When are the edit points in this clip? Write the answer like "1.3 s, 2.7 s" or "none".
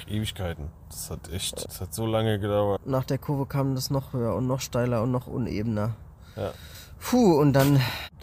1.6 s, 2.8 s

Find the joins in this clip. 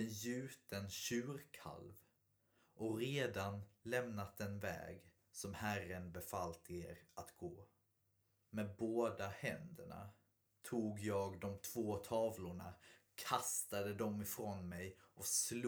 none

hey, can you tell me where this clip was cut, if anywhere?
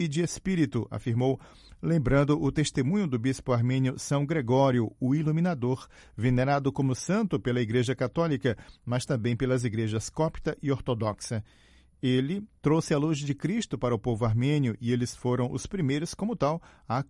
none

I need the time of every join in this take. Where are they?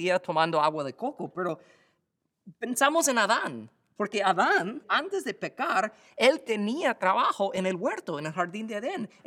4.8 s

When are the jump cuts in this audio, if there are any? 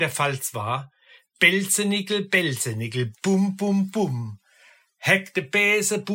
none

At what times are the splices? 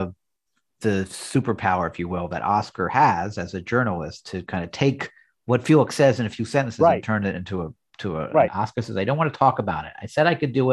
8.5 s

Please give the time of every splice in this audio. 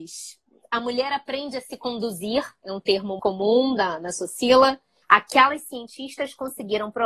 3.2 s, 5.0 s

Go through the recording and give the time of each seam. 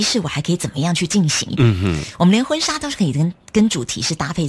1.5 s

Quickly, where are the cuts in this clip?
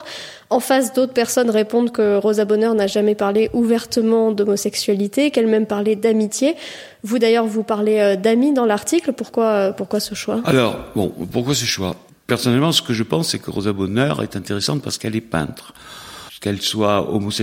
none

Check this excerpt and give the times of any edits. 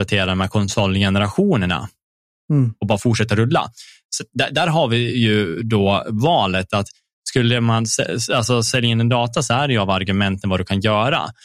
none

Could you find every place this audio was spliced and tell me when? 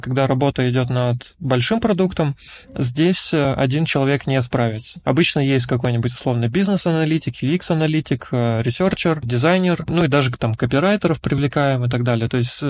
none

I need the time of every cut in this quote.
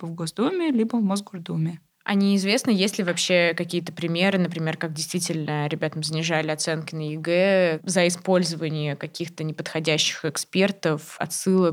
none

